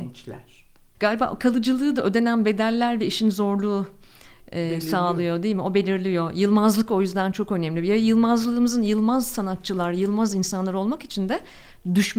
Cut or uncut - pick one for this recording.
cut